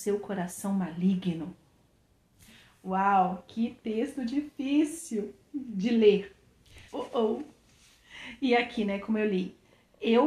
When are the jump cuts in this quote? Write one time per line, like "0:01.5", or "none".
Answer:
0:06.9